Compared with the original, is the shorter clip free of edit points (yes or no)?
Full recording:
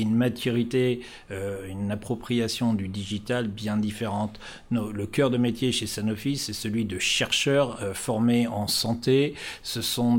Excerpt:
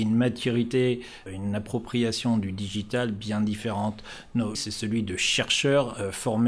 no